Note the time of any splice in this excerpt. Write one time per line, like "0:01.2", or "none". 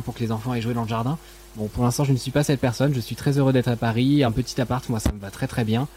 none